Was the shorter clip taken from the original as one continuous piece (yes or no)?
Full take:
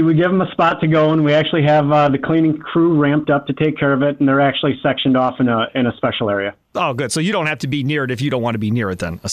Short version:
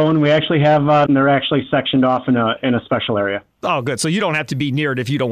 no